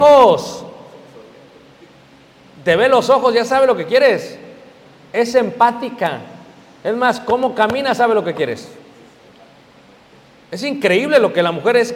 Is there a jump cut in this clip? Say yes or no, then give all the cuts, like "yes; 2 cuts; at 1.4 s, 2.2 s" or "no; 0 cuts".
no; 0 cuts